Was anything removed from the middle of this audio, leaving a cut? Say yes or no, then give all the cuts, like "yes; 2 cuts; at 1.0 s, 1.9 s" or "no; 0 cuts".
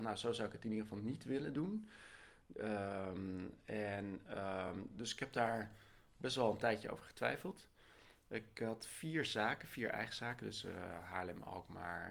no; 0 cuts